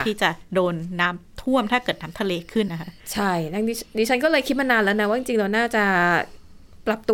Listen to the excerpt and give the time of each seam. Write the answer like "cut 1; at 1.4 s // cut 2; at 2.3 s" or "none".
cut 1; at 2.7 s